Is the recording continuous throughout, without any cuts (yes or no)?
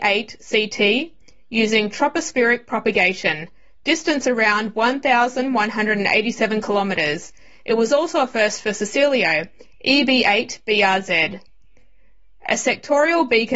yes